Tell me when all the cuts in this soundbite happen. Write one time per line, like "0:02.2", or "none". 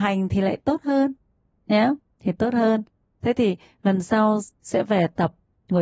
0:04.6